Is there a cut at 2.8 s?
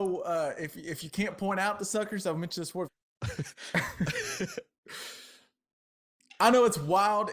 yes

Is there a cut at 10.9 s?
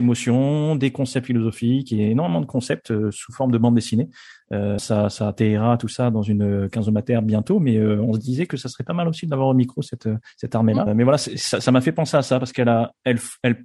yes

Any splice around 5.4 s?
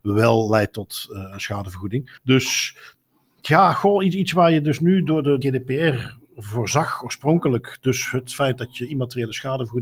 yes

